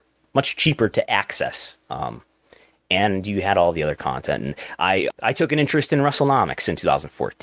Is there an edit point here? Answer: yes; 1 cut; at 5.1 s

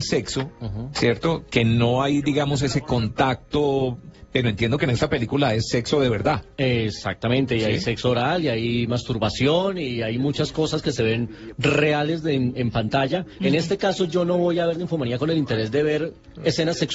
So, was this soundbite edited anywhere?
yes; 1 cut; at 13.4 s

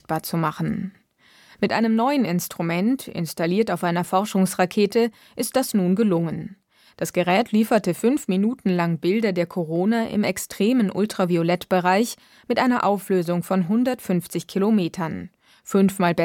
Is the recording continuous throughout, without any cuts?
yes; 0 cuts

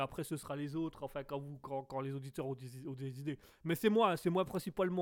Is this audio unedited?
yes; 0 cuts

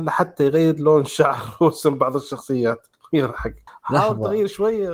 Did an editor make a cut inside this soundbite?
no; 0 cuts

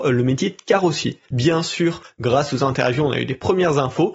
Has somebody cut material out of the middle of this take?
yes; 1 cut; at 1.3 s

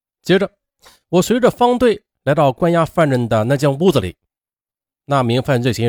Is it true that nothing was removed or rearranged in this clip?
yes; 0 cuts

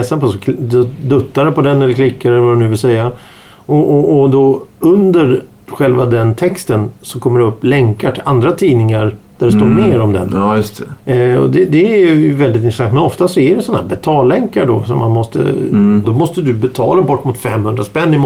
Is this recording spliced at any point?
yes; 2 cuts; at 11.0 s, 16.0 s

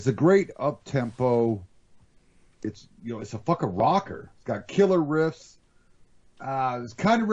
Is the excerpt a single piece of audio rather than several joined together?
yes; 0 cuts

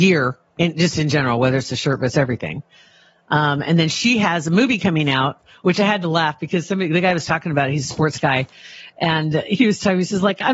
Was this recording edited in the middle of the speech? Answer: no; 0 cuts

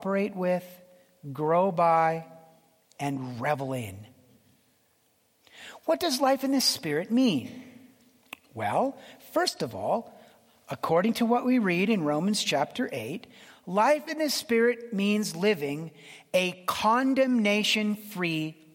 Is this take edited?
no; 0 cuts

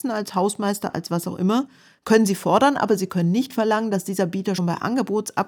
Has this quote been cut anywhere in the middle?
yes; 1 cut; at 4.6 s

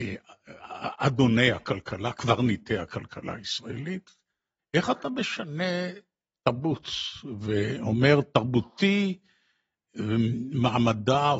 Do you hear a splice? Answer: yes; 1 cut; at 4.6 s

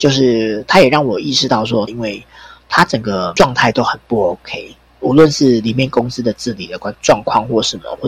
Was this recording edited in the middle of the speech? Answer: yes; 2 cuts; at 1.9 s, 6.9 s

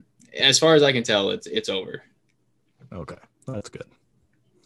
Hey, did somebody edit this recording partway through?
no; 0 cuts

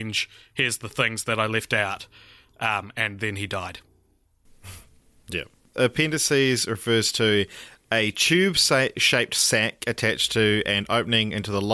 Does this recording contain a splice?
no; 0 cuts

